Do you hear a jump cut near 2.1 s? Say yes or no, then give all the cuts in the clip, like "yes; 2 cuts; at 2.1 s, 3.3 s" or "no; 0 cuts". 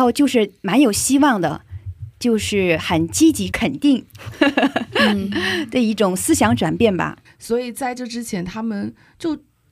no; 2 cuts; at 3.5 s, 7.2 s